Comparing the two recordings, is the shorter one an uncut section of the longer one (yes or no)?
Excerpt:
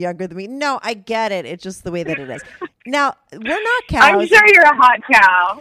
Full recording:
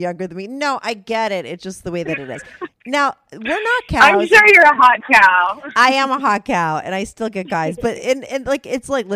yes